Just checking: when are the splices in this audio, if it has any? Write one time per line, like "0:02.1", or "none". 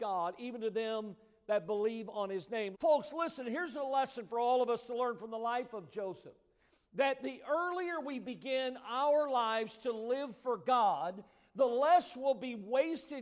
0:02.7